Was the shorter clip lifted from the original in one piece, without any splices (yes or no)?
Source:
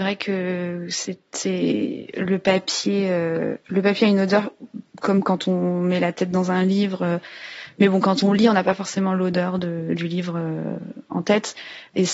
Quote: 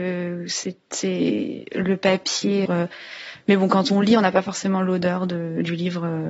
no